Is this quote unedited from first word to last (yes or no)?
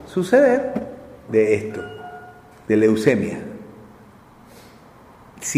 no